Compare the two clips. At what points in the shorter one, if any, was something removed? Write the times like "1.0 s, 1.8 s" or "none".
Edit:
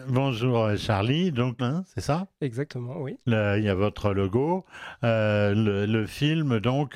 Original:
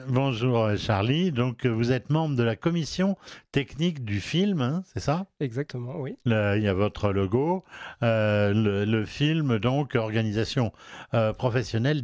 1.6 s